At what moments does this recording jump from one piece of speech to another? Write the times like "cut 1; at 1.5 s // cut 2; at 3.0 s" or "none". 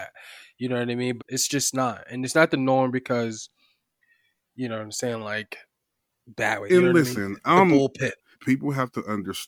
cut 1; at 1.2 s // cut 2; at 6.7 s // cut 3; at 8.3 s